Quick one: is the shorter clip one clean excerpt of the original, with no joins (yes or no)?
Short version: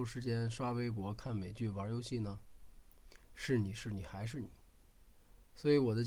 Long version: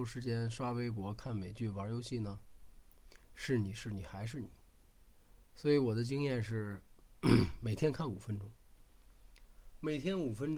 yes